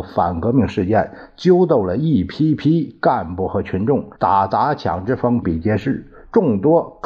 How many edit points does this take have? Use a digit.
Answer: 2